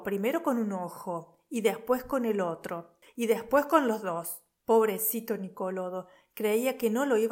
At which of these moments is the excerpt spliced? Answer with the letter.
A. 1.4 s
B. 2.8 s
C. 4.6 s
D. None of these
C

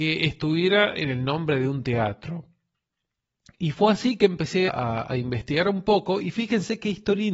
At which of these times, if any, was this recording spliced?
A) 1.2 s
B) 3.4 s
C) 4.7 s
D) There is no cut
C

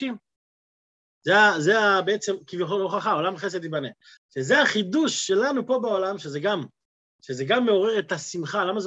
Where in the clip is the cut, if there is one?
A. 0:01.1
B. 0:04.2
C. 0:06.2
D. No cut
B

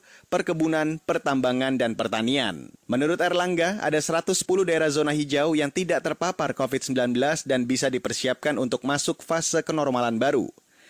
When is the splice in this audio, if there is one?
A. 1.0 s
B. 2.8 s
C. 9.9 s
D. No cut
B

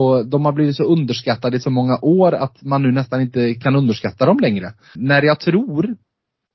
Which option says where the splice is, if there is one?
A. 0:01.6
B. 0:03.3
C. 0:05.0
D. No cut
C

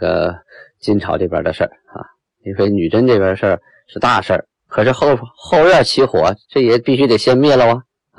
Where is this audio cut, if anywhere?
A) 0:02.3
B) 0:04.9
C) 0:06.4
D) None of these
C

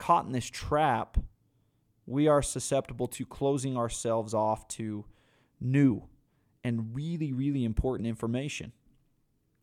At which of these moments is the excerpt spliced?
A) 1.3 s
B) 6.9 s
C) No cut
C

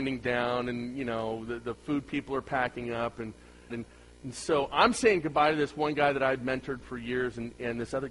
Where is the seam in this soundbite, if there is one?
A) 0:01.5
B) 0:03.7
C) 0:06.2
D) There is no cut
B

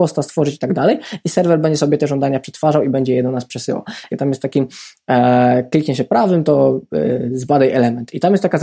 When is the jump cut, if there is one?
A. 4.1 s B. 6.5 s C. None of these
A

